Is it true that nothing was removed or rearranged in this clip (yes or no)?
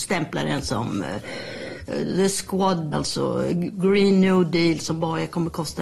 no